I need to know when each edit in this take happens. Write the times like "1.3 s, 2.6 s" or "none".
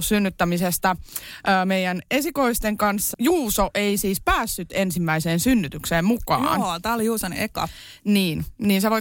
3.1 s